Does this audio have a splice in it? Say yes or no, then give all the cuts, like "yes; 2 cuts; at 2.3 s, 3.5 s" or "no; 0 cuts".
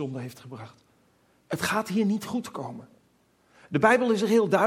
yes; 1 cut; at 1.4 s